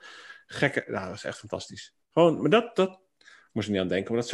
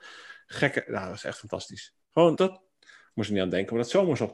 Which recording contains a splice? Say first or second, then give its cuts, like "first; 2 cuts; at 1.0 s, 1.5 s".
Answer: second; 1 cut; at 2.4 s